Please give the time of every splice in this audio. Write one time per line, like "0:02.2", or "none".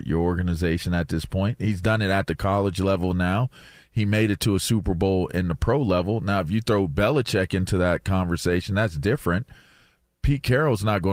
none